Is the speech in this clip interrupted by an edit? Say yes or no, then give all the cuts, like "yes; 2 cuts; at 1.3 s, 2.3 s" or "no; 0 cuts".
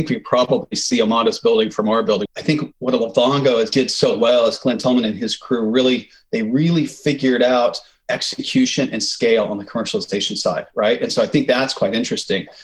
yes; 1 cut; at 2.3 s